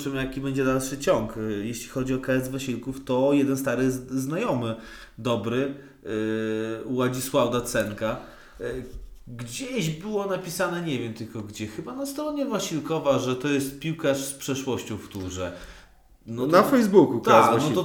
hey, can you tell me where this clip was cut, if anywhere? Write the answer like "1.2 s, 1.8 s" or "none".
none

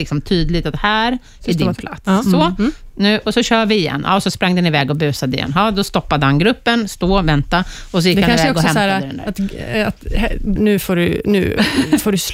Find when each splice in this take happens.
10.6 s

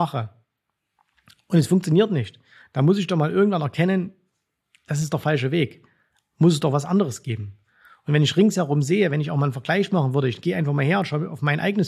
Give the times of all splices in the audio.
none

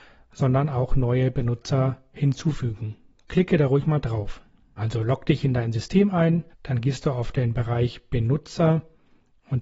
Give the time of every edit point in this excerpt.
4.8 s, 6.5 s

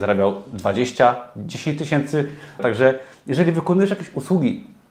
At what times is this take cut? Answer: 2.6 s

